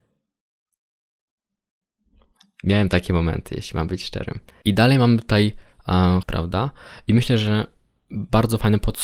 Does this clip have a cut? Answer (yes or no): yes